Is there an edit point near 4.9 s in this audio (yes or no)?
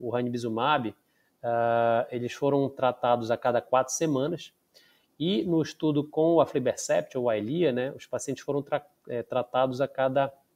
no